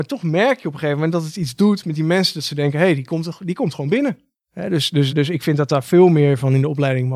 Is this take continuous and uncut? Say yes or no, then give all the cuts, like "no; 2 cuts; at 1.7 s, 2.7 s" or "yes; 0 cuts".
no; 1 cut; at 5.1 s